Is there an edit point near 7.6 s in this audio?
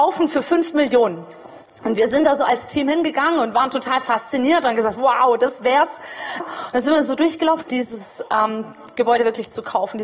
yes; 2 cuts; at 6.4 s, 7.6 s

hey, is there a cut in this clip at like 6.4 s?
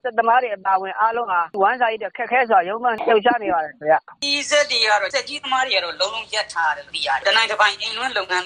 no; 1 cut; at 4.2 s

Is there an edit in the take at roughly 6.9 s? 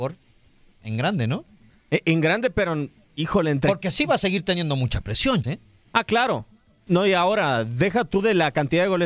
yes; 2 cuts; at 5.4 s, 6.9 s

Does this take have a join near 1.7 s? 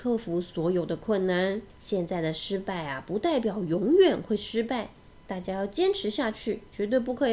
yes; 1 cut; at 1.7 s

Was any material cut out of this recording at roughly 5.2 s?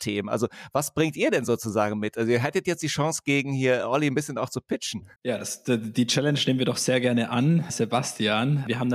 yes; 1 cut; at 5.2 s

